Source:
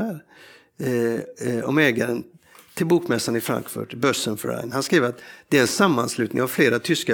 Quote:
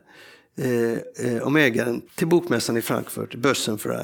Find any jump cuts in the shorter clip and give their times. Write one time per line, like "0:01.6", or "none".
0:02.1